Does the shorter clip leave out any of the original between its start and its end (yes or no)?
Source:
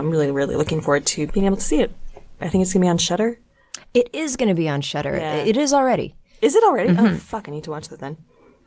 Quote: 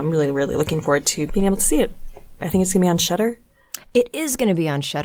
no